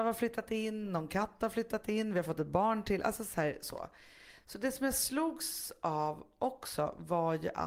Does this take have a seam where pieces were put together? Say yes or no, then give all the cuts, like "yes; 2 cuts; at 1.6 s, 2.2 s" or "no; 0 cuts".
no; 0 cuts